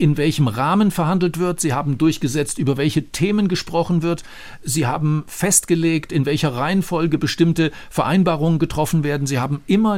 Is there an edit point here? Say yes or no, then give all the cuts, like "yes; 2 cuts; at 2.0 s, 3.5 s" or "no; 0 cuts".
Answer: no; 0 cuts